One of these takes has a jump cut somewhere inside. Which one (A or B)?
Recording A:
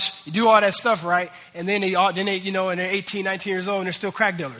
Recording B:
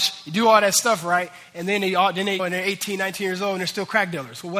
B